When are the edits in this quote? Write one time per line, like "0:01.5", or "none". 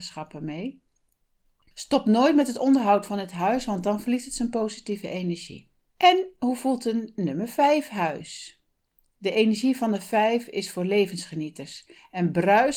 0:05.9